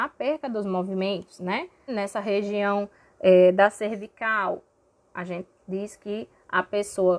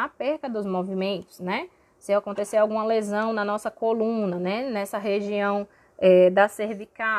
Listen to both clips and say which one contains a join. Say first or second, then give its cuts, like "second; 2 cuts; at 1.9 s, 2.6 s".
first; 1 cut; at 1.9 s